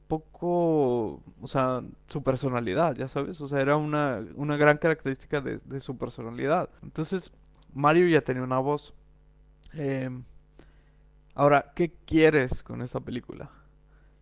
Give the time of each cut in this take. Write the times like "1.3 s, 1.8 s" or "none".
6.8 s